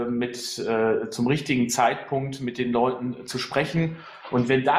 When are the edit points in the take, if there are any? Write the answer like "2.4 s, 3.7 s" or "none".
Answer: none

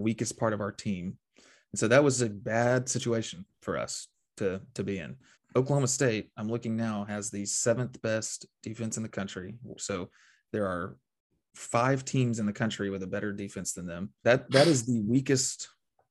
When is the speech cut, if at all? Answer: 5.3 s, 9.8 s, 14.2 s

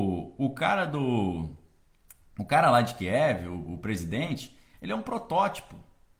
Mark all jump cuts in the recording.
none

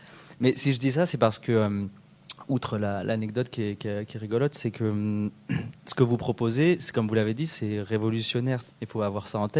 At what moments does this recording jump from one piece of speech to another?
8.6 s

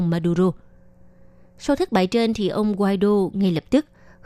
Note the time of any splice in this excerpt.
none

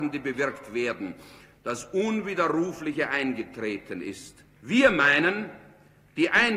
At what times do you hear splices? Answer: 4.6 s

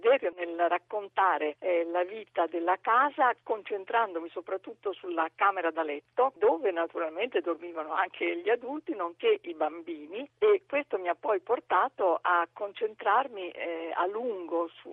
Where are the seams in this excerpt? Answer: none

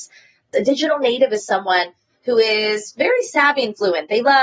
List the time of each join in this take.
none

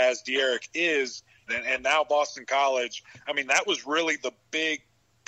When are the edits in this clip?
1.5 s

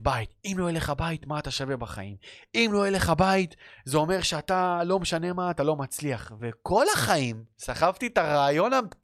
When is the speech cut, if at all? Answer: none

